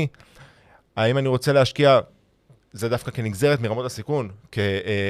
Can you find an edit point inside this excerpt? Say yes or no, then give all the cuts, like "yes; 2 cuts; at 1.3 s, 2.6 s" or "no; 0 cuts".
no; 0 cuts